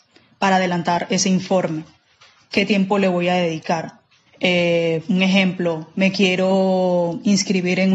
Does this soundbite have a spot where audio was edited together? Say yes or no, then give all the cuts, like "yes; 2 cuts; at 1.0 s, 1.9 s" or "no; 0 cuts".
yes; 1 cut; at 4.3 s